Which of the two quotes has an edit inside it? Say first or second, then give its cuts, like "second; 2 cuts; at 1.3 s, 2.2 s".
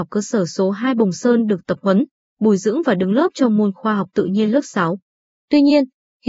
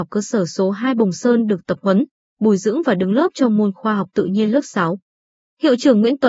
first; 1 cut; at 5.3 s